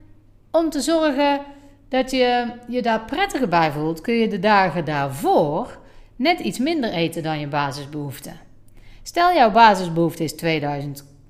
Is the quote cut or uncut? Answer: uncut